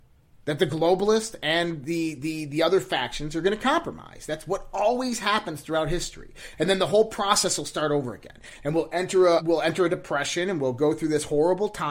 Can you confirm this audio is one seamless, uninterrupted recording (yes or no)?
no